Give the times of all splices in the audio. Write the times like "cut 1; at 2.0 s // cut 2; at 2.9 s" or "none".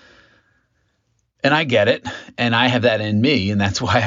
none